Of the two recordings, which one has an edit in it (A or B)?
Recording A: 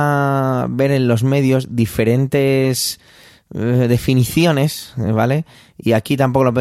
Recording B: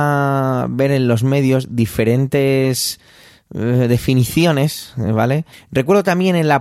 B